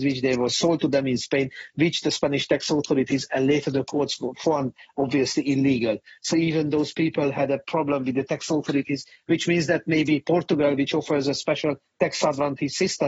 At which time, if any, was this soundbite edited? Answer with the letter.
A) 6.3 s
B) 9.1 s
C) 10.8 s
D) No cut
A